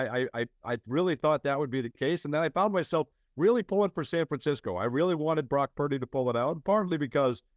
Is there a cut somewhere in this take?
no; 0 cuts

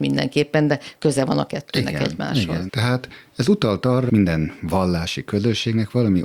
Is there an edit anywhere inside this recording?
yes; 2 cuts; at 2.7 s, 4.1 s

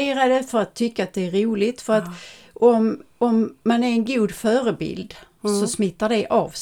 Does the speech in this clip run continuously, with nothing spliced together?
yes; 0 cuts

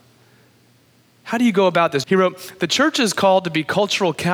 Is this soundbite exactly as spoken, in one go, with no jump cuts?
no; 1 cut; at 2.0 s

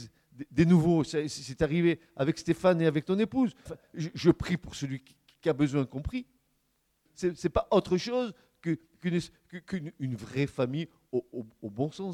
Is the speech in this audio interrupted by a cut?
yes; 2 cuts; at 3.7 s, 7.1 s

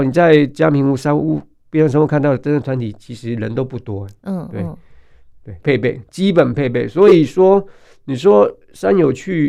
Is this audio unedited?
no; 2 cuts; at 4.2 s, 5.6 s

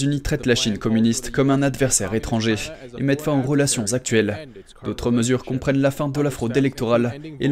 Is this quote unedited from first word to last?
yes; 0 cuts

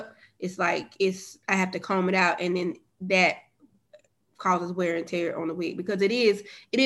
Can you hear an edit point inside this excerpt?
yes; 1 cut; at 1.4 s

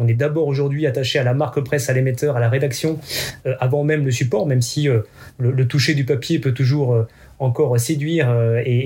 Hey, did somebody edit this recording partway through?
no; 0 cuts

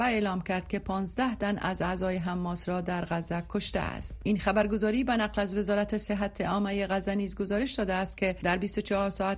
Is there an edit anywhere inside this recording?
no; 0 cuts

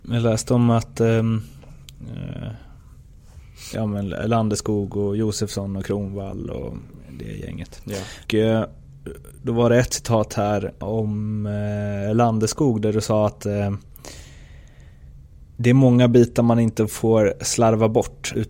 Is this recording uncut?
no; 1 cut; at 3.7 s

